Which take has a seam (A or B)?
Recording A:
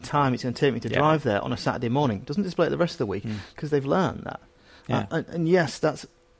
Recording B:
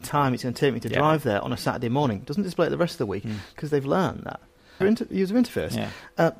B